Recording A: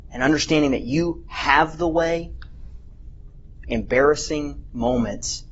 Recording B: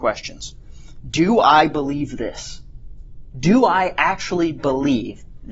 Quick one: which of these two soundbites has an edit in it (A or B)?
A